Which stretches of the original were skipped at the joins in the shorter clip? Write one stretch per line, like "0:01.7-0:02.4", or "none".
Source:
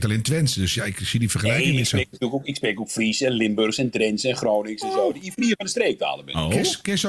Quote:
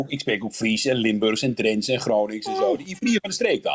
none